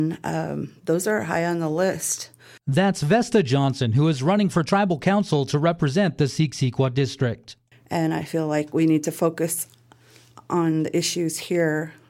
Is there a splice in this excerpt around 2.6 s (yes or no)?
yes